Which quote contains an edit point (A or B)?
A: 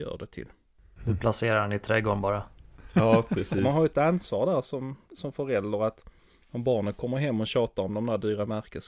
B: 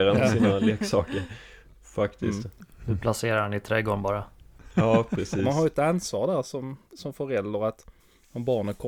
A